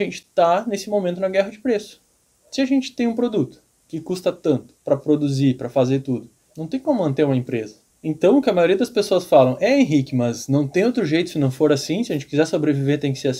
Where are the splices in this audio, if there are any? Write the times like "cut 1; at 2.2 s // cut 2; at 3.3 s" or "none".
cut 1; at 6.5 s